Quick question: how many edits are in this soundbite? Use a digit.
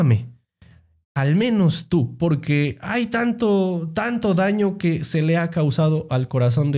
1